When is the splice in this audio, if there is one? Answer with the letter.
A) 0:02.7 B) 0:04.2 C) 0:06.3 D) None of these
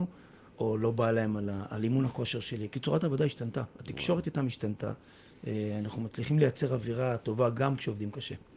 A